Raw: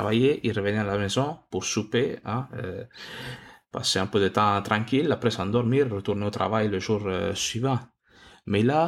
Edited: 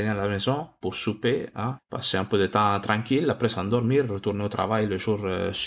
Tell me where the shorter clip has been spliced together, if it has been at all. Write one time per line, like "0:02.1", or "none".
0:01.8